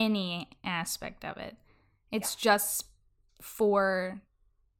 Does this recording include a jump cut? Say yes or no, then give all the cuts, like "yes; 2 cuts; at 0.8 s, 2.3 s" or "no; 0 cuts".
no; 0 cuts